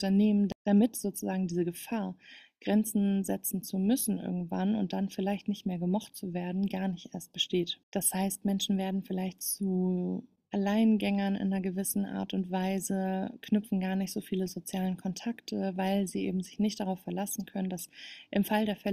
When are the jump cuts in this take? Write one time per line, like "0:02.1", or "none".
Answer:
0:07.8